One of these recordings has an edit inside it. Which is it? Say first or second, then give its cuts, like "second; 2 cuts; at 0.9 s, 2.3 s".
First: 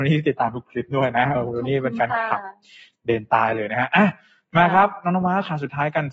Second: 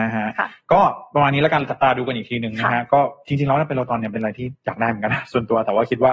first; 1 cut; at 1.4 s